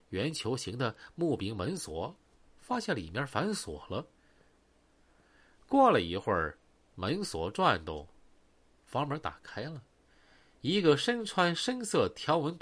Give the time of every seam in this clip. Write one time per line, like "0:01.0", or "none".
0:04.9